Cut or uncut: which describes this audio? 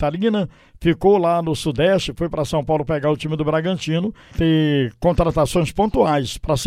cut